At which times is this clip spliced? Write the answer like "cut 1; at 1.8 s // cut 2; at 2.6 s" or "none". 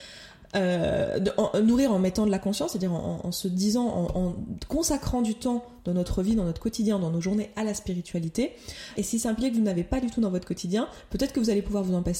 cut 1; at 9.0 s